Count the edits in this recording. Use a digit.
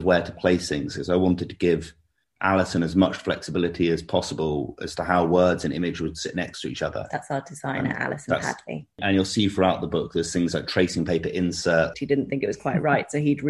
1